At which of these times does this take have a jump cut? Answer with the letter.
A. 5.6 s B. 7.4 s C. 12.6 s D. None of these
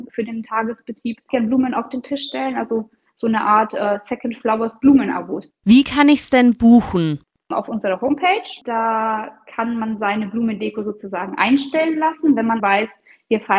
C